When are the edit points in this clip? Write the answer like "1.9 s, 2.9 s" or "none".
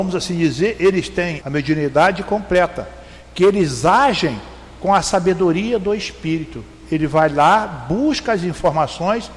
1.4 s